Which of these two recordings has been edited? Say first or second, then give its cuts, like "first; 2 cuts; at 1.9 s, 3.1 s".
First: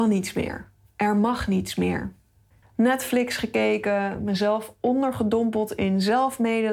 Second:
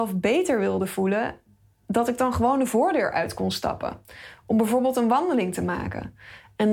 first; 1 cut; at 2.6 s